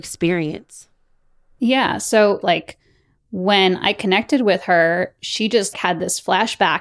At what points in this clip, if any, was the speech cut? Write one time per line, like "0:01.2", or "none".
0:02.4
0:05.7

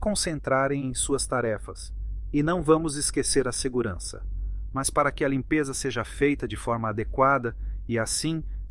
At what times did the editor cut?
0:04.7

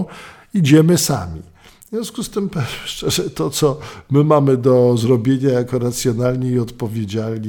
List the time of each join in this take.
none

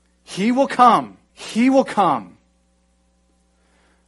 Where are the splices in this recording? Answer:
0:01.3

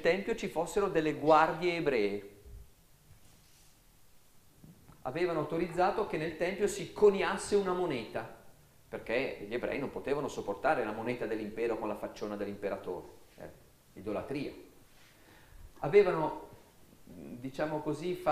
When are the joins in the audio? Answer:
none

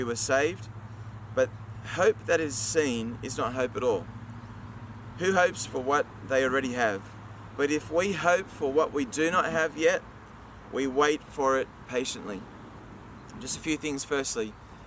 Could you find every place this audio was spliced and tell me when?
none

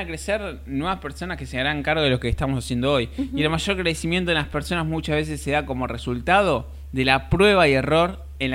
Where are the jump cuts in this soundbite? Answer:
none

